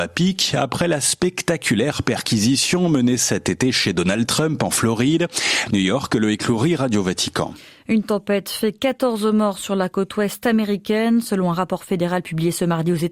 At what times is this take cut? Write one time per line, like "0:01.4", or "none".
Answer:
0:05.7